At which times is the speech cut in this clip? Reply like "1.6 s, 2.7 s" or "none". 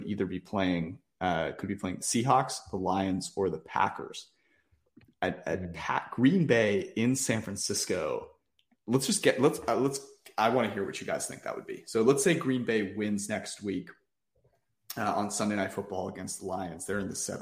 none

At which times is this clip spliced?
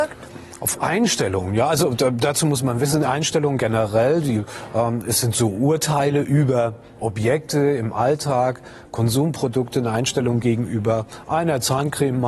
none

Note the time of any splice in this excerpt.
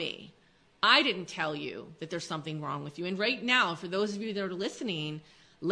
none

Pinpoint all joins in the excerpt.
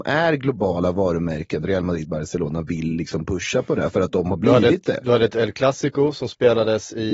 none

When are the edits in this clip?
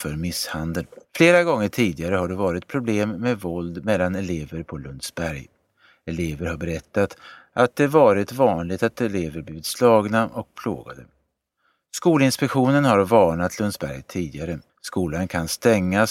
1.0 s, 14.7 s

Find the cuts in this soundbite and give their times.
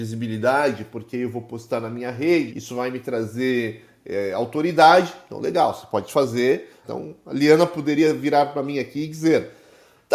2.5 s, 6.8 s

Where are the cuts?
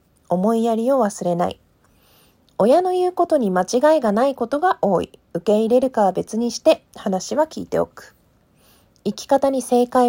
none

